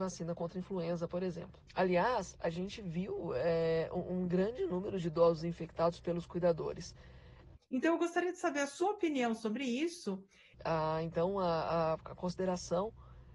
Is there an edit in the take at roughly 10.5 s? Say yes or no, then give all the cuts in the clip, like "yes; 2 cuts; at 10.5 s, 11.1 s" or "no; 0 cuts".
yes; 3 cuts; at 1.7 s, 7.6 s, 10.5 s